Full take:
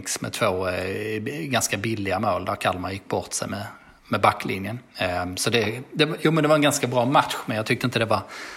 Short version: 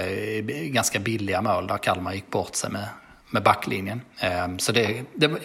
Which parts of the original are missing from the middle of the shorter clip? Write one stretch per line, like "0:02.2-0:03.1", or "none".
none